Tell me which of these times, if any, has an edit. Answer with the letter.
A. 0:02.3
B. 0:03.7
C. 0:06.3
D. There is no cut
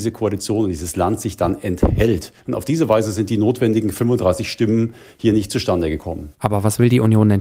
C